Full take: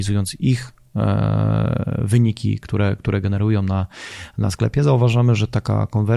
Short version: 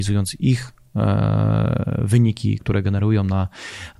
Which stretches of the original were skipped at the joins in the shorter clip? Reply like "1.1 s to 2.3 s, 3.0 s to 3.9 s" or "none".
2.6 s to 3.0 s